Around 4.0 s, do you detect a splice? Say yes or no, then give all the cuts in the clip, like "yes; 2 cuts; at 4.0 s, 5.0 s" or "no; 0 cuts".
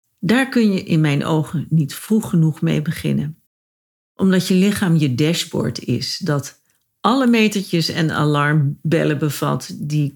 yes; 1 cut; at 4.0 s